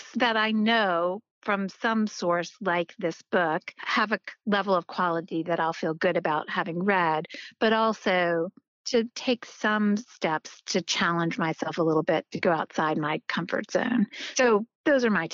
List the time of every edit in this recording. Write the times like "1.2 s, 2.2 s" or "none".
none